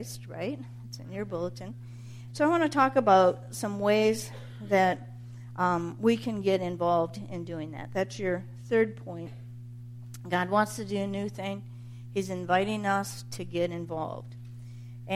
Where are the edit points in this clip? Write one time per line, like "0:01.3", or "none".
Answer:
0:02.3